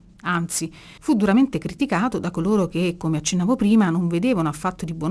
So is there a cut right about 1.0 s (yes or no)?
yes